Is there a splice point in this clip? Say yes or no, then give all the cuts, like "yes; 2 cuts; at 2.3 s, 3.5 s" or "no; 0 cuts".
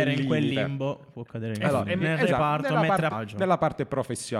yes; 2 cuts; at 2.0 s, 3.1 s